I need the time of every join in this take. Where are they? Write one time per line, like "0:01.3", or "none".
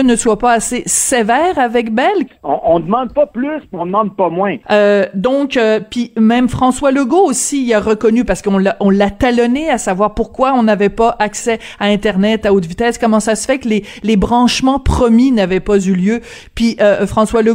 0:02.3
0:04.6